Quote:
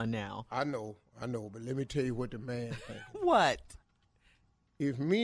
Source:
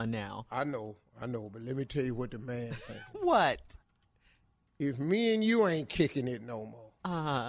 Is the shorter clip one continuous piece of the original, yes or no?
yes